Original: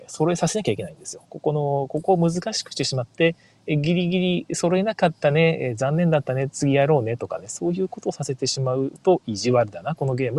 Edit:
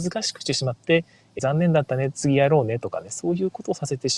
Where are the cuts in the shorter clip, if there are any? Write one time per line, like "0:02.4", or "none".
0:01.4